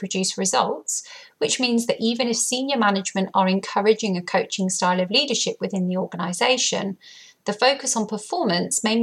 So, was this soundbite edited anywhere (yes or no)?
no